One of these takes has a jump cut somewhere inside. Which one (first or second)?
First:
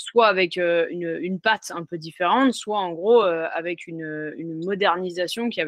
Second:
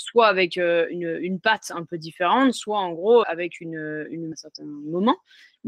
second